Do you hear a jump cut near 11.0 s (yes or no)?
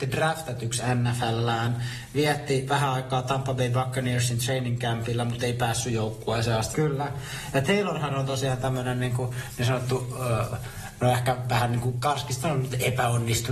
no